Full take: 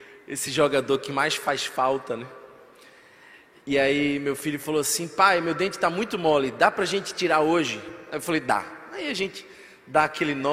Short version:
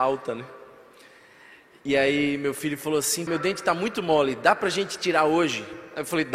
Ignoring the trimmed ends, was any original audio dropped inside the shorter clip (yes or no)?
yes